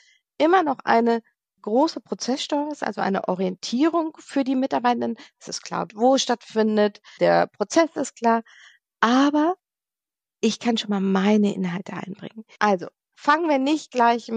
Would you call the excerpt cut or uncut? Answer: cut